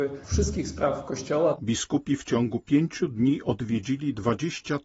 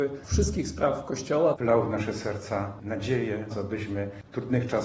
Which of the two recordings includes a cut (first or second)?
second